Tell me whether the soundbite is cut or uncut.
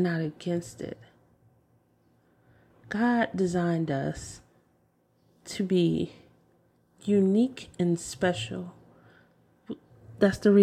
uncut